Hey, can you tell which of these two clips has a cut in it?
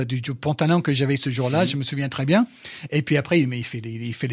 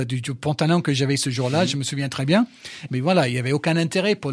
second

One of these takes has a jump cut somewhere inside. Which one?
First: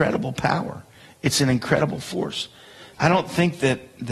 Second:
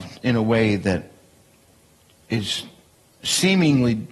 first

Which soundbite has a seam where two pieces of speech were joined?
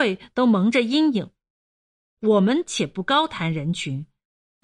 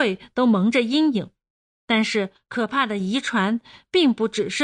second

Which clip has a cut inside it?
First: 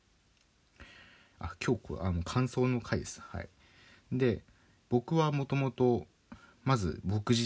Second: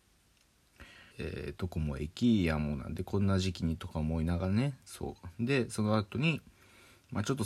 second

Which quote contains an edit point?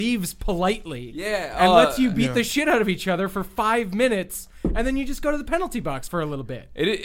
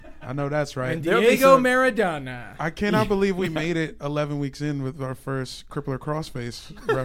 first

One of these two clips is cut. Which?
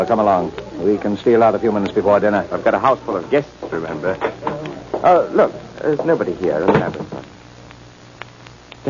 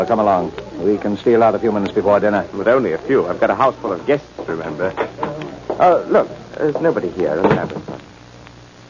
first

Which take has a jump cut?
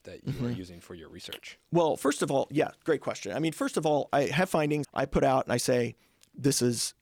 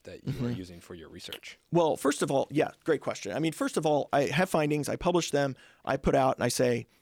first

